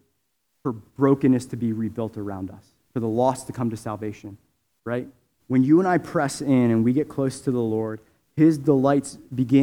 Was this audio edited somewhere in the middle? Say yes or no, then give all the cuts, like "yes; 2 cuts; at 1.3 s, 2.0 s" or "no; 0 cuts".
yes; 1 cut; at 5.4 s